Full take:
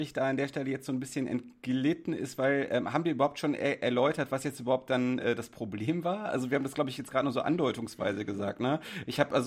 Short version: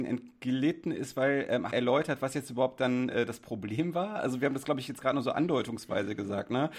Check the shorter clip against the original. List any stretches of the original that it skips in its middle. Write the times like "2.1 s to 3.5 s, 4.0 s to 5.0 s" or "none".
2.9 s to 3.8 s